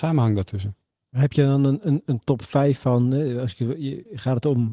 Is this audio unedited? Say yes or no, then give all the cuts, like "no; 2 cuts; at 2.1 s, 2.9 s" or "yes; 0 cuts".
yes; 0 cuts